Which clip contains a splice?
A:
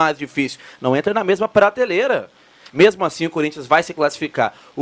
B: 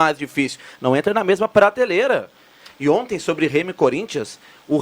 A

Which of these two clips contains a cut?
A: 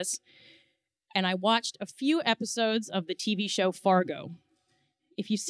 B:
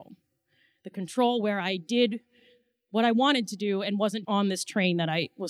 B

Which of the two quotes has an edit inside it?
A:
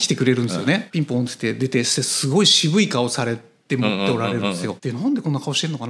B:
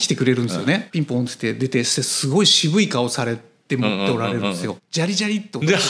B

